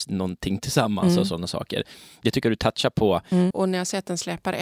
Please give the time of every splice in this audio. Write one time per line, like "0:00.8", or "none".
0:03.5